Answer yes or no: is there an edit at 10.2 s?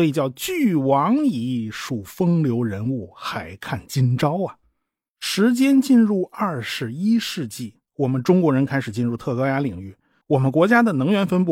yes